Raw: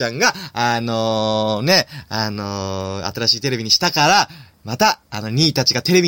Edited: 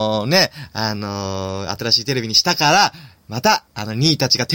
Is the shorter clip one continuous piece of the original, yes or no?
yes